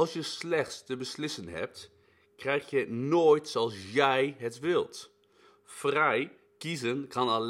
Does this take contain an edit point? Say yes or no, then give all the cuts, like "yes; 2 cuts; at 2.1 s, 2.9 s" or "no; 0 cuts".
no; 0 cuts